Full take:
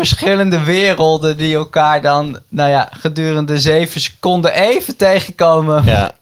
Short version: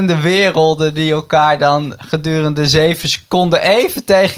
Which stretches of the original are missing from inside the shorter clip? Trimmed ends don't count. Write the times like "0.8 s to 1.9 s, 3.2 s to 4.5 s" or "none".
2.4 s to 2.9 s